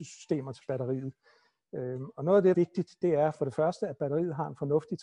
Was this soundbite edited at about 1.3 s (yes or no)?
no